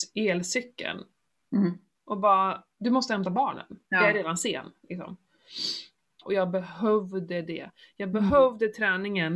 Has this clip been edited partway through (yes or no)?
yes